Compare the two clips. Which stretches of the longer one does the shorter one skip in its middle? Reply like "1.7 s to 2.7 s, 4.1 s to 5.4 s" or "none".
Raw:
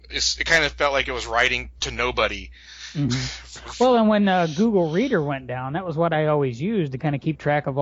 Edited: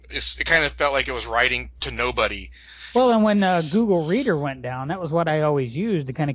2.9 s to 3.8 s